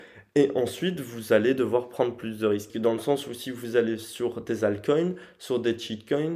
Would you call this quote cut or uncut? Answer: cut